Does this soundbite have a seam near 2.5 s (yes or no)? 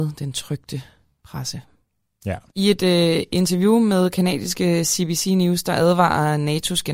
yes